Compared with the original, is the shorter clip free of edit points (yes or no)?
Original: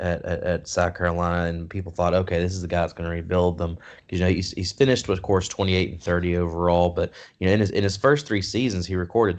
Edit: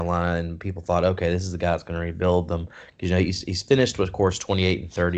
yes